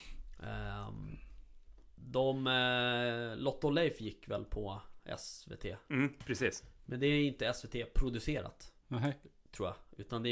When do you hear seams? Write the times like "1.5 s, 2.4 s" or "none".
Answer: none

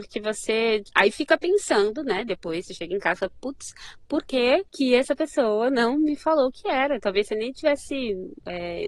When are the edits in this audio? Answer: none

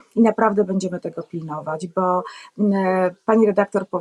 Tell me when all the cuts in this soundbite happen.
none

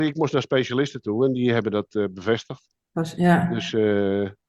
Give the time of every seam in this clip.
none

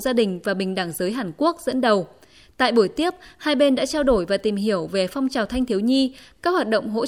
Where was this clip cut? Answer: none

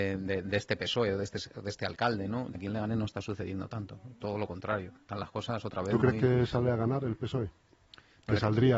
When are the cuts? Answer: 2.5 s

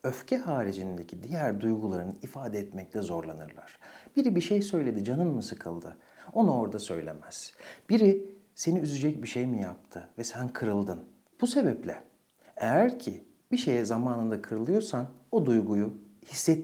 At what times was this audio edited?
11.3 s

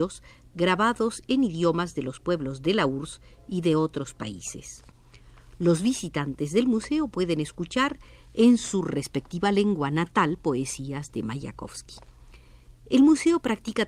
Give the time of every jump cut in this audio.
none

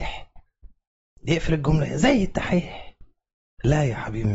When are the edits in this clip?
none

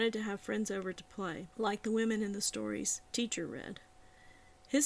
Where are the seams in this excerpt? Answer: 1.5 s, 3.1 s

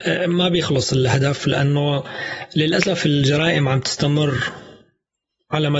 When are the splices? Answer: none

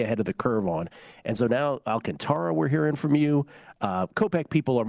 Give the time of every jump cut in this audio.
none

